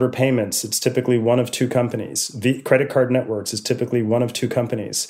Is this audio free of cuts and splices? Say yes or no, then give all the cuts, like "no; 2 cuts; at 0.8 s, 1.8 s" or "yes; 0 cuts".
yes; 0 cuts